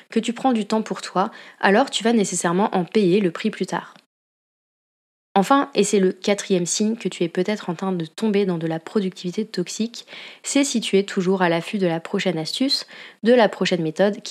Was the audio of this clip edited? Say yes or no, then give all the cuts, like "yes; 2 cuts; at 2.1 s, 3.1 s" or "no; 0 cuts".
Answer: no; 0 cuts